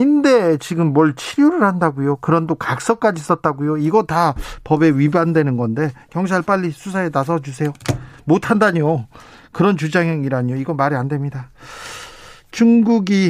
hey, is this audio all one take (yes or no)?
yes